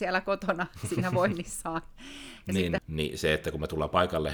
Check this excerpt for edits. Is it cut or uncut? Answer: cut